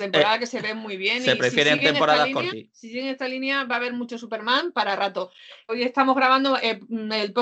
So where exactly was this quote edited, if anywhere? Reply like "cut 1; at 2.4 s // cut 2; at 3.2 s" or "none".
cut 1; at 2.5 s // cut 2; at 5.7 s